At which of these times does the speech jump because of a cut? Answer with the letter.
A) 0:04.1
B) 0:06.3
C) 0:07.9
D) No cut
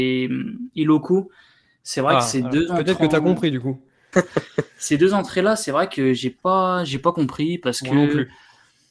A